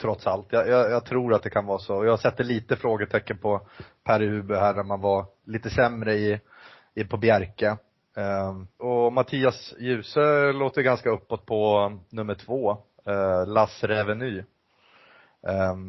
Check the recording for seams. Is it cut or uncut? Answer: cut